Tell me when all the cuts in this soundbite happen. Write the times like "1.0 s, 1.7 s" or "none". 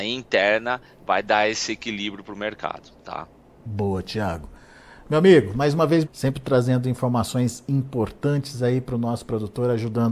6.1 s